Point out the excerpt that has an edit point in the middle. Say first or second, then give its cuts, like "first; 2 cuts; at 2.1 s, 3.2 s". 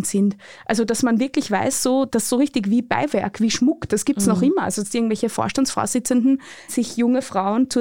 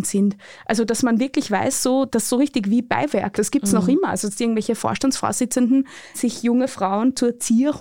second; 1 cut; at 3.3 s